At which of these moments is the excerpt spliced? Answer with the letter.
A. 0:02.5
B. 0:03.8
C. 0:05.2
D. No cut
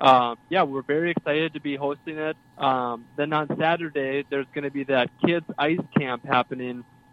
A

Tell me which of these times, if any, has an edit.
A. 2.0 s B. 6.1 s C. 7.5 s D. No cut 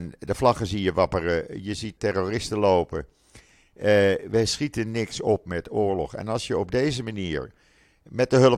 A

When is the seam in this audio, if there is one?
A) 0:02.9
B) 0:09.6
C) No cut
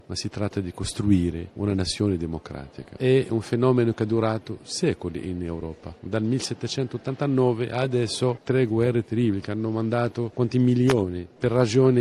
C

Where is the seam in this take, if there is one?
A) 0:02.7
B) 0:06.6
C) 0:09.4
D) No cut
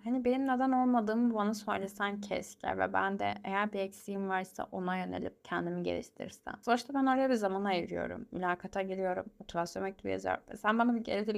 D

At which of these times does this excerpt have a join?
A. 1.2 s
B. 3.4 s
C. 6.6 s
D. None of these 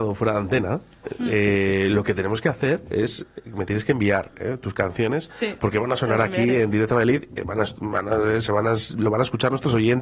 D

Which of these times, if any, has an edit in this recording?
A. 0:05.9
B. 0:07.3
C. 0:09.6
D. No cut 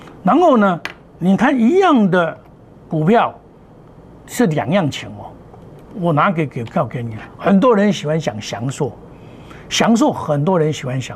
D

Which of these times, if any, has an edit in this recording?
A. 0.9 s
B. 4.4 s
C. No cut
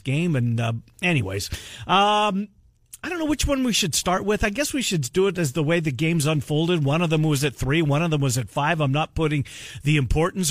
C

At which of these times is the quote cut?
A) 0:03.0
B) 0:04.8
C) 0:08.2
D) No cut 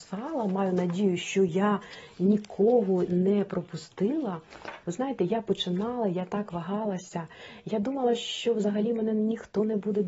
B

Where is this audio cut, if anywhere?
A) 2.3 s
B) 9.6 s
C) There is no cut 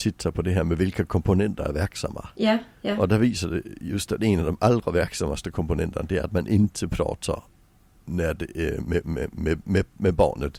C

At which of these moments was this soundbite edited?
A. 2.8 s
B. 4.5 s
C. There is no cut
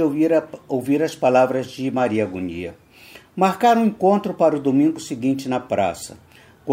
C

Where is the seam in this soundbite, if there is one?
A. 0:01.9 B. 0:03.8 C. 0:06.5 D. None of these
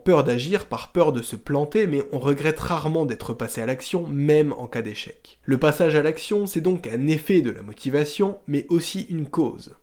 D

